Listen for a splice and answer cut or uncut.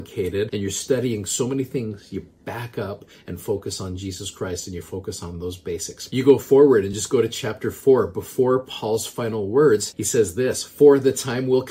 uncut